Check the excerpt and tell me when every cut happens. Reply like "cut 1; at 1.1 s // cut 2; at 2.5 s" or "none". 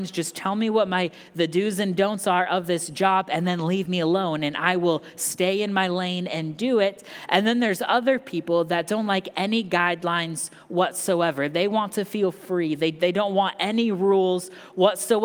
none